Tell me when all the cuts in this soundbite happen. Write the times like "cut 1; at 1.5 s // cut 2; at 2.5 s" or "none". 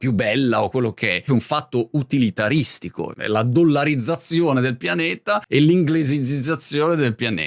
cut 1; at 1.3 s

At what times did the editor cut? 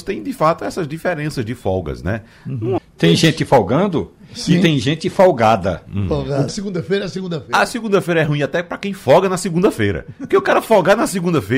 cut 1; at 2.8 s // cut 2; at 6.5 s

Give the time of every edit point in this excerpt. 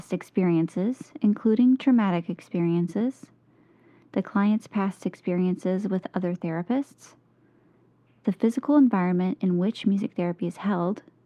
none

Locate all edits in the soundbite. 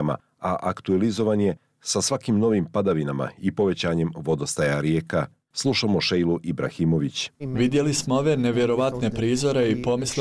cut 1; at 7.4 s

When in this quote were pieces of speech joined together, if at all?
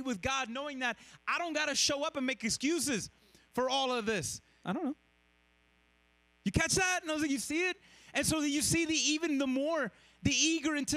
cut 1; at 4.6 s

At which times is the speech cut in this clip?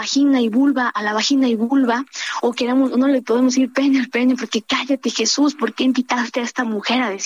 none

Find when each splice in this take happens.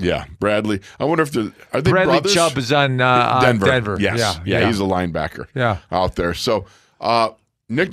none

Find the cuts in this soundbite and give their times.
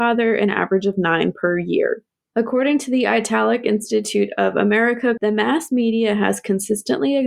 cut 1; at 5.2 s

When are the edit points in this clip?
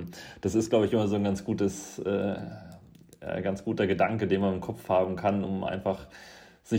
none

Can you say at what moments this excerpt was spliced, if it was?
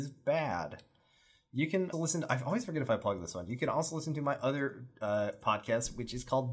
cut 1; at 1.9 s

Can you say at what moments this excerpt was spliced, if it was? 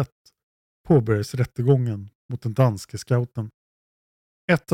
none

